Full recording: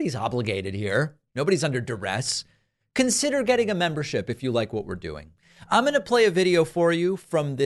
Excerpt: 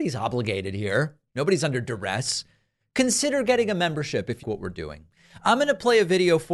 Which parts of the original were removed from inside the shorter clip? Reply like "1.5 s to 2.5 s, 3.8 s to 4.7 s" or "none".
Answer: 4.4 s to 4.7 s

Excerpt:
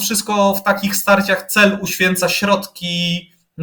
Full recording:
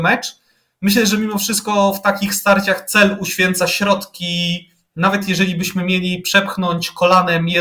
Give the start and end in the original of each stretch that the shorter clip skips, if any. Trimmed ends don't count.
none

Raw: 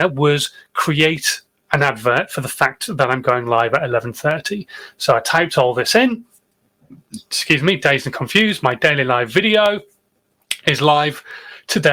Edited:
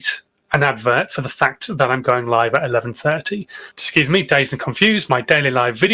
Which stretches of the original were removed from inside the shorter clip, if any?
4.9 s to 7.2 s

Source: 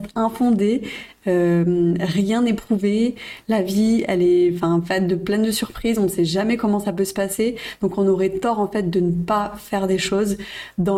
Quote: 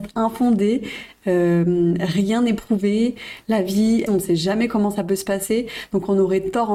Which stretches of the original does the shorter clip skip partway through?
4.1 s to 5.9 s

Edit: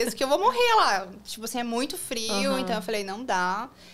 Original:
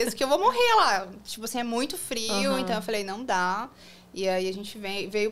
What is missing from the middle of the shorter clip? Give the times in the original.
none

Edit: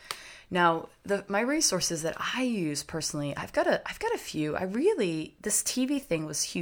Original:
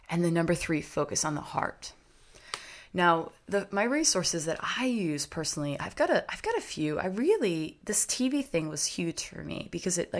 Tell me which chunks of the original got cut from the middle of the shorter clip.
none

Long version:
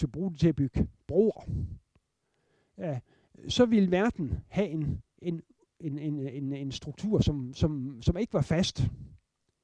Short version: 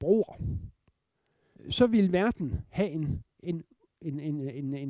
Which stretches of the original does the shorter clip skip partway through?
2.6 s to 3.3 s

